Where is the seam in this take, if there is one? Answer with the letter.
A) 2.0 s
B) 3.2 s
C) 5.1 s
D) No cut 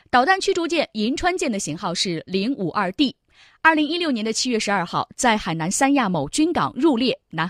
D